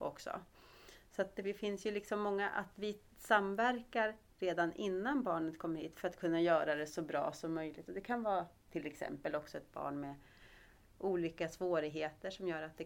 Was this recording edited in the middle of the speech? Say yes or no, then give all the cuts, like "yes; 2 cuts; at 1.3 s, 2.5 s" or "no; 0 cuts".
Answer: no; 0 cuts